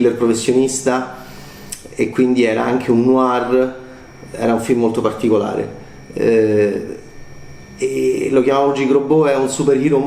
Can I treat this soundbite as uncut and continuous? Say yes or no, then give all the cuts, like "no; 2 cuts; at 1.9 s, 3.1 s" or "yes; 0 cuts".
yes; 0 cuts